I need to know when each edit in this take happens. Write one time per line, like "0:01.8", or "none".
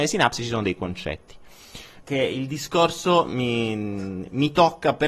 0:02.0